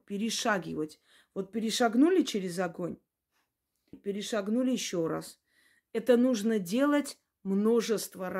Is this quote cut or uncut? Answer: cut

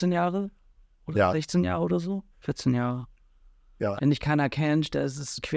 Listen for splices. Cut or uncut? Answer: cut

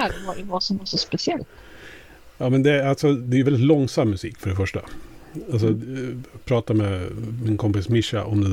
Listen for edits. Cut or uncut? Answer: uncut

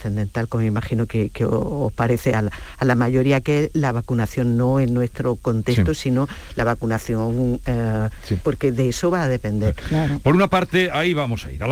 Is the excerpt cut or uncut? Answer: cut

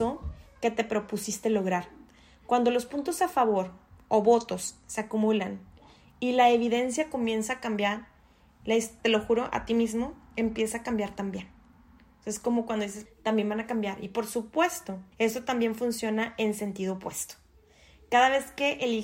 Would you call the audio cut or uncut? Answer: cut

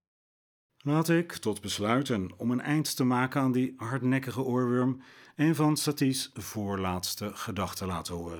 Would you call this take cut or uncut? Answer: uncut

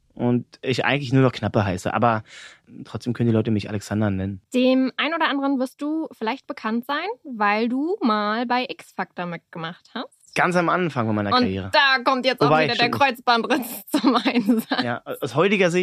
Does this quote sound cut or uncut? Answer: uncut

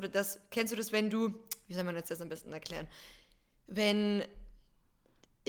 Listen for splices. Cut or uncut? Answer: uncut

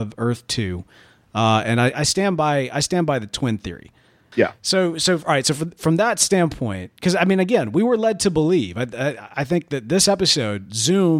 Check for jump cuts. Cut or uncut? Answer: uncut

